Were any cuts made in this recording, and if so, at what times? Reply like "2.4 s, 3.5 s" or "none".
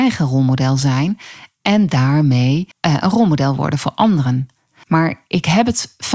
2.7 s, 4.8 s